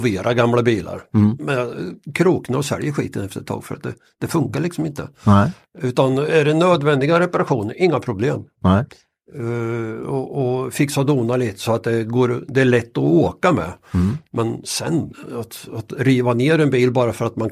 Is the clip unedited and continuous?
yes; 0 cuts

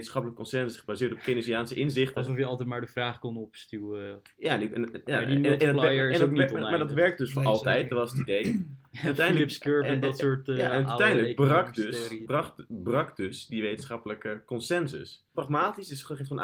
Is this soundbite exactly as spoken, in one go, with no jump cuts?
no; 2 cuts; at 12.3 s, 15.3 s

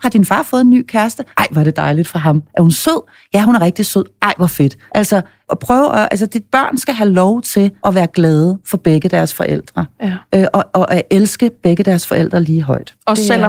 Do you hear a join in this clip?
no; 0 cuts

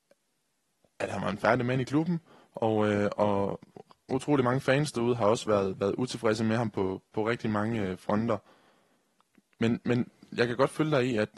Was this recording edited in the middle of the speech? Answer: no; 0 cuts

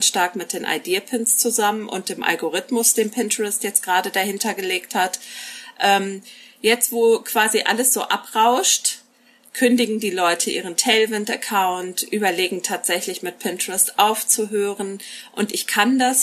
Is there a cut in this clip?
no; 0 cuts

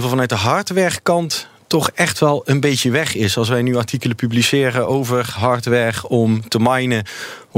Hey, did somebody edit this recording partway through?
no; 0 cuts

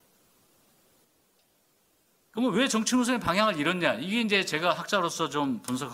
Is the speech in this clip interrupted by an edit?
no; 0 cuts

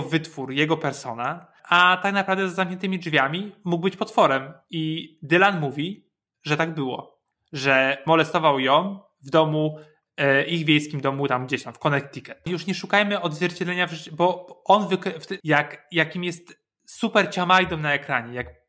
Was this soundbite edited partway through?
yes; 2 cuts; at 12.5 s, 15.4 s

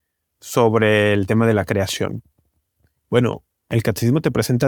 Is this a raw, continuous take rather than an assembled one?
yes; 0 cuts

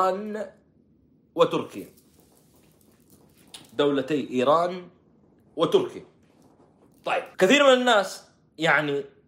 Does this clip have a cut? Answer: yes; 1 cut; at 7.3 s

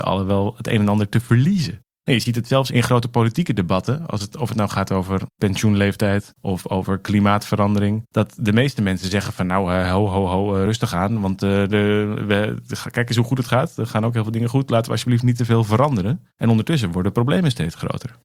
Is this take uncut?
yes; 0 cuts

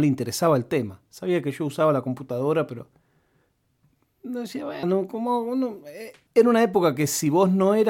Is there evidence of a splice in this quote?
yes; 1 cut; at 4.8 s

